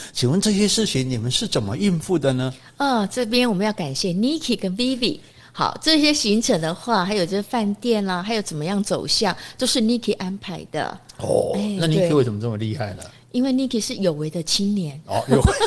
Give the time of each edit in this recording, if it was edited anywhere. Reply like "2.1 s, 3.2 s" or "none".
none